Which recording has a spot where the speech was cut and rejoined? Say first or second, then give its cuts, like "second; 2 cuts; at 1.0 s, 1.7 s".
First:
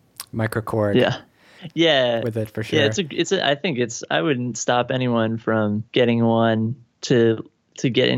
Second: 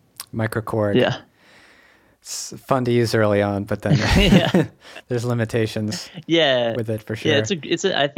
first; 2 cuts; at 1.6 s, 5.9 s